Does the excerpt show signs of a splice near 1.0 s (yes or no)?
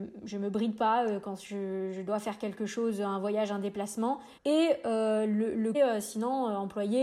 no